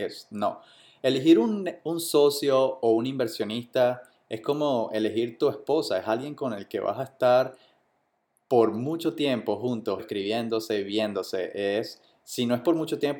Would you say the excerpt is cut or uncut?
cut